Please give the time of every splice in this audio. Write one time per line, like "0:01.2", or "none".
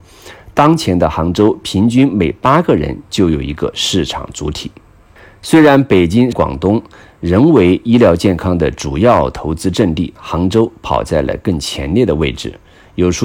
0:06.3
0:10.2